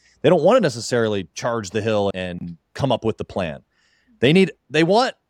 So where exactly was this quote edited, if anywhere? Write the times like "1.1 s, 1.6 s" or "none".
2.1 s